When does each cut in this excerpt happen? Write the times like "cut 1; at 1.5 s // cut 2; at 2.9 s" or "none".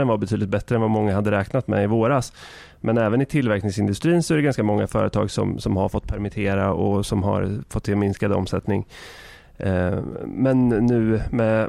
none